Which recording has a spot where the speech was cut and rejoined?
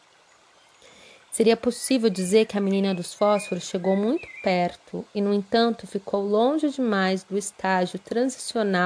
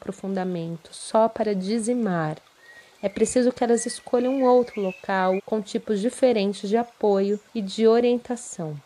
second; 2 cuts; at 5.4 s, 7.5 s

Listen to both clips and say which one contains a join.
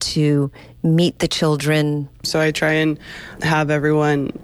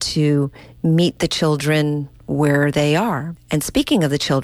first; 1 cut; at 2.2 s

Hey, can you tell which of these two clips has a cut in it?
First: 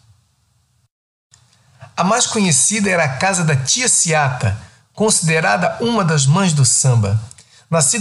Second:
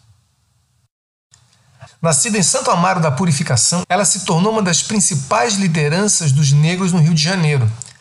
second; 2 cuts; at 1.9 s, 3.8 s

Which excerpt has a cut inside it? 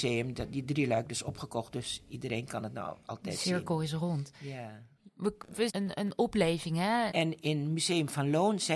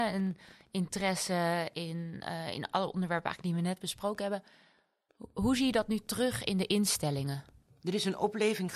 first; 2 cuts; at 5.7 s, 7.1 s

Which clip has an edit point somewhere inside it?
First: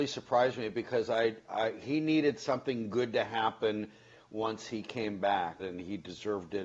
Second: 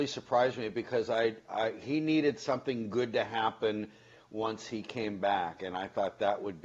first; 1 cut; at 5.6 s

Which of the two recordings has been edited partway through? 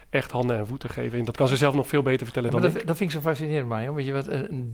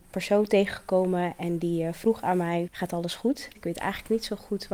second; 1 cut; at 3.5 s

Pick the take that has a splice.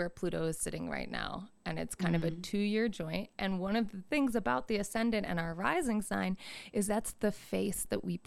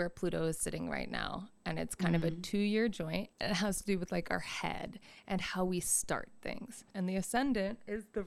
second; 2 cuts; at 3.3 s, 6.9 s

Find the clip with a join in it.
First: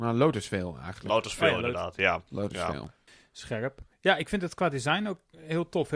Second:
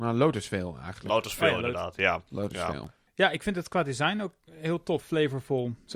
second; 2 cuts; at 3.1 s, 5.0 s

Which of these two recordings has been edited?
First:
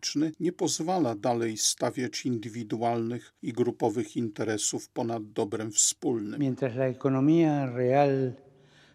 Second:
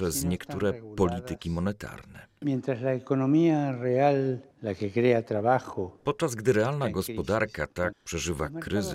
second; 3 cuts; at 2.4 s, 4.5 s, 7.9 s

